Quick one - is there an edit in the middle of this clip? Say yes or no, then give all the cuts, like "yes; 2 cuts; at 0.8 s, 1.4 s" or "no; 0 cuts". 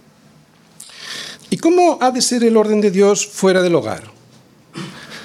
yes; 1 cut; at 1.4 s